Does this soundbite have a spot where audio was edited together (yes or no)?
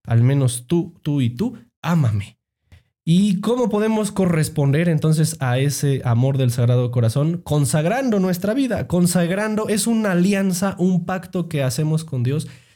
no